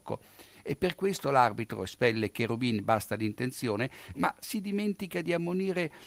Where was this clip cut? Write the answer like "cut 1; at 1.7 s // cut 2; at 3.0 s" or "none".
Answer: cut 1; at 4.1 s